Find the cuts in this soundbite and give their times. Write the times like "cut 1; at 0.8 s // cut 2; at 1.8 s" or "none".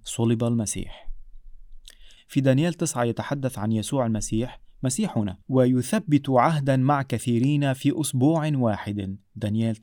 cut 1; at 2.2 s // cut 2; at 5.4 s